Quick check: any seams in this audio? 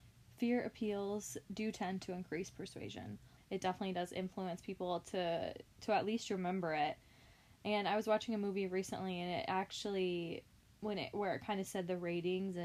yes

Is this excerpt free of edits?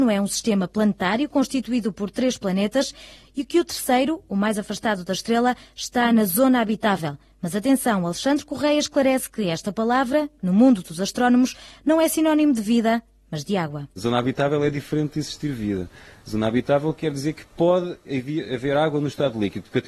yes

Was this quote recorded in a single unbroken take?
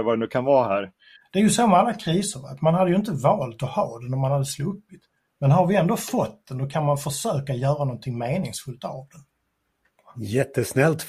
no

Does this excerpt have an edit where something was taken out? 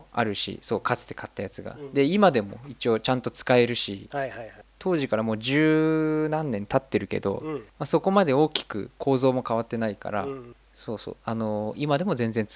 yes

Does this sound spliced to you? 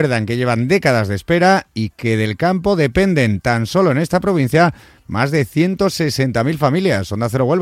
no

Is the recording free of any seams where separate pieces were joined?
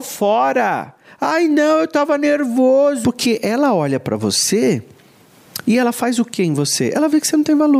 no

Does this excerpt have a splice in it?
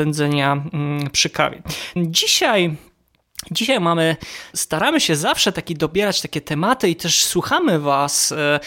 yes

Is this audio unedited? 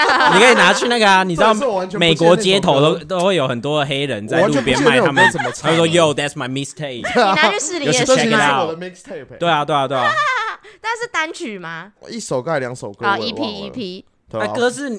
yes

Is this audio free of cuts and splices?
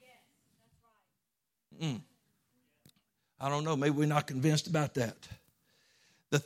yes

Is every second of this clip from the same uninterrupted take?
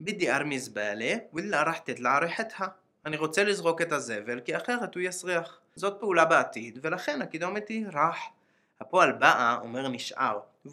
no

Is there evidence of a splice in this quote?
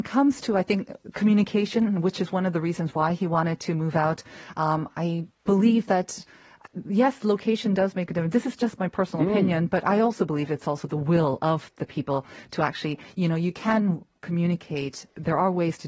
no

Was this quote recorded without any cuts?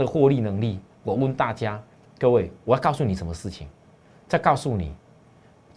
no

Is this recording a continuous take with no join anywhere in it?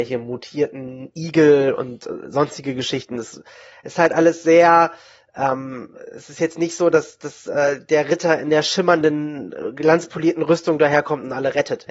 yes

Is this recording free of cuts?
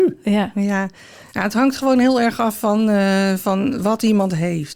yes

